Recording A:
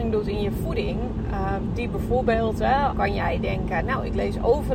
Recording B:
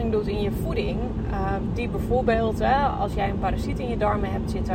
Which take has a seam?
A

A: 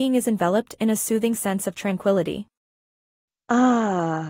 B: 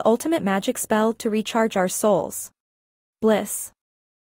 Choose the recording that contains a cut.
B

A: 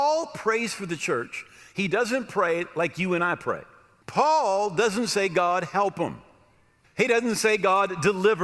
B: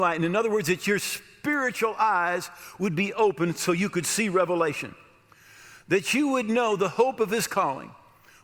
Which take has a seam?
A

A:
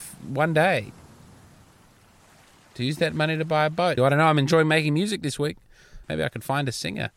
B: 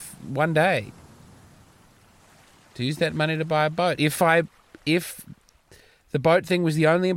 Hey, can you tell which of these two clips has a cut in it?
A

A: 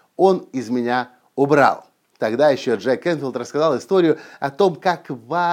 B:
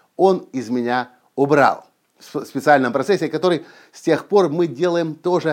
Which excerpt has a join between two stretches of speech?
A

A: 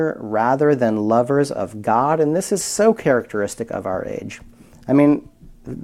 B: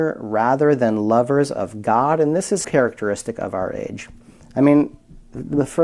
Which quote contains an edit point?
B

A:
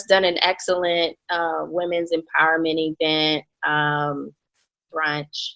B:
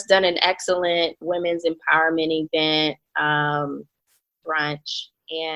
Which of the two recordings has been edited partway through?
B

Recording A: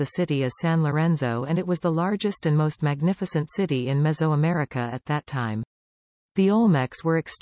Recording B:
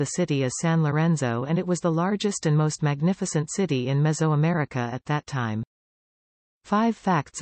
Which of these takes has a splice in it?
A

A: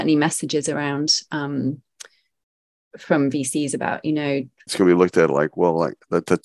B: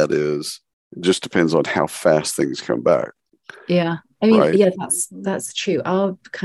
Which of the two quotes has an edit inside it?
A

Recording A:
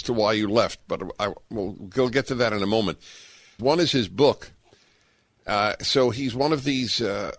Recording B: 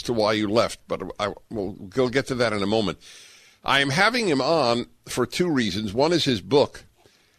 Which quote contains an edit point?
A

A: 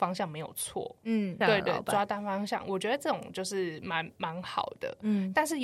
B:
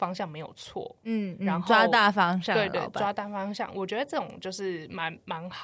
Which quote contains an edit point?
A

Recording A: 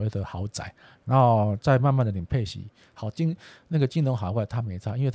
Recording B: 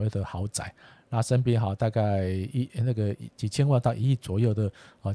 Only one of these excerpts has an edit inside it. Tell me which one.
A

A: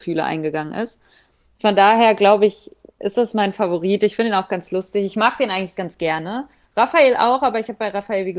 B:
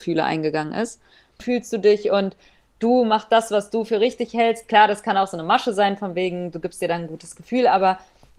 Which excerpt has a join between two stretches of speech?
B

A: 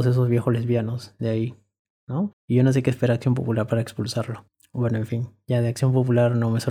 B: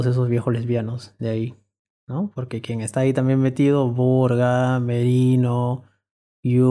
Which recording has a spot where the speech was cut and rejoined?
A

